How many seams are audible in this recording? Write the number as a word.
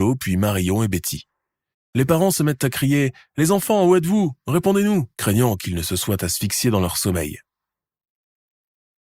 two